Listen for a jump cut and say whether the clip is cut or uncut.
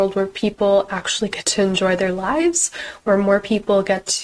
uncut